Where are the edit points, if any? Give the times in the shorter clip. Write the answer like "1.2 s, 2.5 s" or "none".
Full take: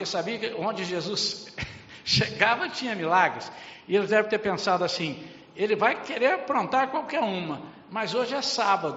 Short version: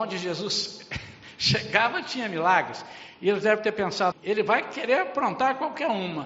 4.1 s